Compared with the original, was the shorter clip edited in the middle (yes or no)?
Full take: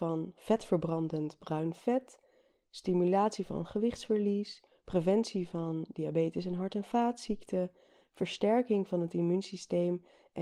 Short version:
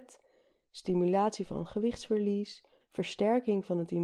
yes